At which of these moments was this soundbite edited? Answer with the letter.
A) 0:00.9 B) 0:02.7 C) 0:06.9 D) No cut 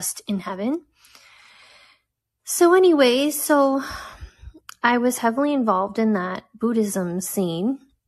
D